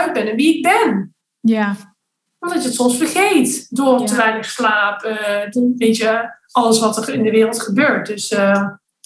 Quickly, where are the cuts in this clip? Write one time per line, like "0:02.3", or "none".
none